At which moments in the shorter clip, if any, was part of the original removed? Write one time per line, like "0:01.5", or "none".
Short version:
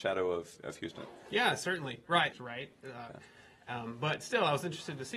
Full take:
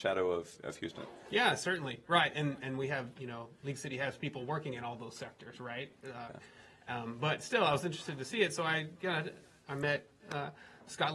0:02.3